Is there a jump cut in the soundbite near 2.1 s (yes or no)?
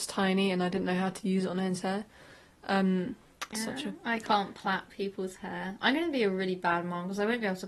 no